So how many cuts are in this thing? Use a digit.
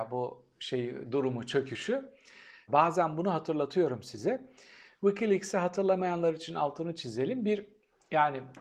1